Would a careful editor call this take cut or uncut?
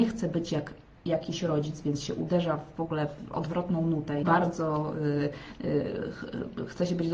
cut